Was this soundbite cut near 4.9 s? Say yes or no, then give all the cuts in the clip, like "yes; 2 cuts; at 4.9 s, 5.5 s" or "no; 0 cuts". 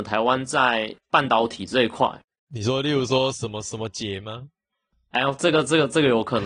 yes; 1 cut; at 4.9 s